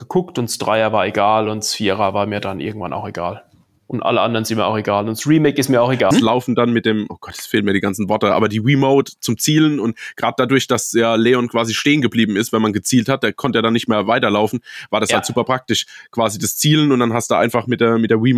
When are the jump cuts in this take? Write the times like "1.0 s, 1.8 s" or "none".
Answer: 6.1 s